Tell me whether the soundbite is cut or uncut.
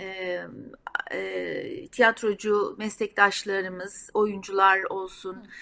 uncut